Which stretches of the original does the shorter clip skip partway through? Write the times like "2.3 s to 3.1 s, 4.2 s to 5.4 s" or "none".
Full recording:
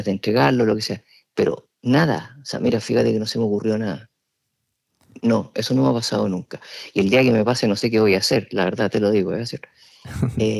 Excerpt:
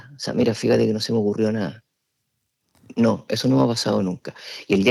none

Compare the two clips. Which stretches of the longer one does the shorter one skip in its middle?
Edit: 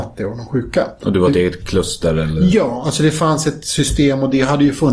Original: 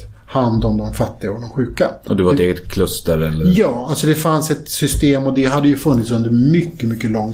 none

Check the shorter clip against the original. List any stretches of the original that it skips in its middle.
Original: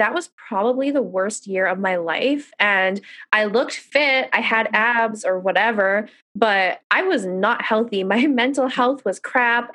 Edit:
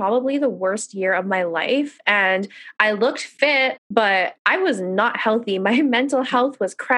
4.3 s to 6.2 s

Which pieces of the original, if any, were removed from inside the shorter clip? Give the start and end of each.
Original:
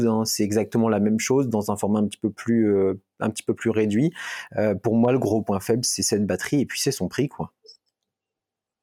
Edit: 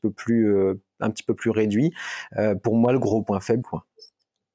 5.8 s to 7.3 s

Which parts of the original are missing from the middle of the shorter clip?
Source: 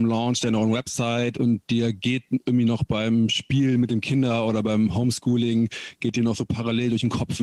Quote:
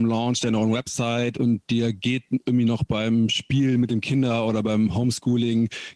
none

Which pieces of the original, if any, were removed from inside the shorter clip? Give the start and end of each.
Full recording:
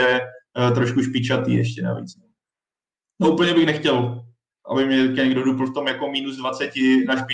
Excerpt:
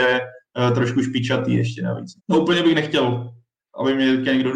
2.2 s to 3.1 s

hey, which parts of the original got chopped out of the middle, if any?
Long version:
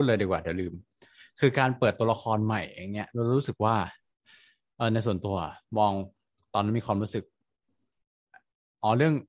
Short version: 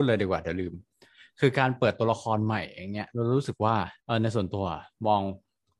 4.0 s to 4.7 s

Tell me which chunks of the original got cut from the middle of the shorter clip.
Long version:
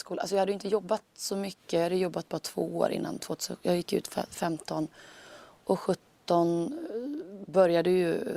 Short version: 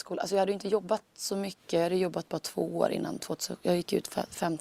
none

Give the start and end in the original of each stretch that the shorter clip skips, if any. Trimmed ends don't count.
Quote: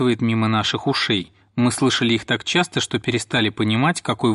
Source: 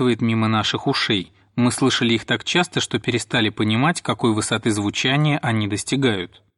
none

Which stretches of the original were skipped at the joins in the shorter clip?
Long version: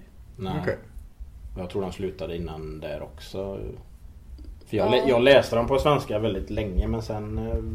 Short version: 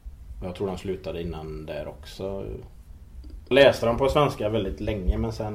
4.7 s to 5.2 s

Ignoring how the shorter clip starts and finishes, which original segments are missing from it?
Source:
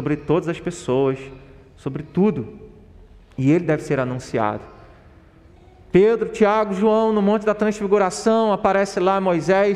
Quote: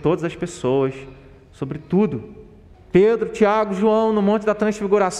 3.0 s to 5.7 s

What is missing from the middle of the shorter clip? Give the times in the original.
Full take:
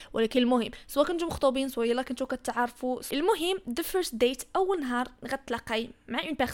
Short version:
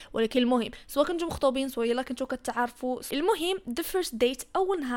none

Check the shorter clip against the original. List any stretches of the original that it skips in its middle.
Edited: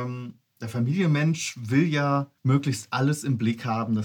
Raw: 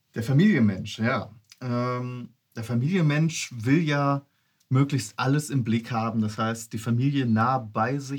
4.3 s to 4.6 s

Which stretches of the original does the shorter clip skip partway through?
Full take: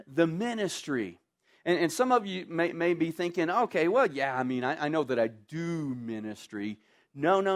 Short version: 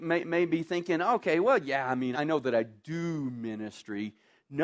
4.6 s to 4.8 s

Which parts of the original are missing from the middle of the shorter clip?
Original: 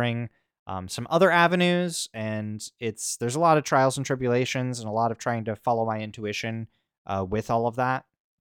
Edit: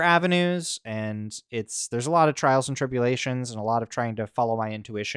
none

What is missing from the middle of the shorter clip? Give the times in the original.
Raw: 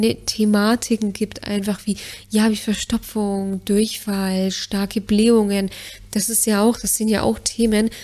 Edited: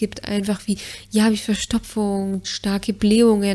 3.6 s to 4.5 s

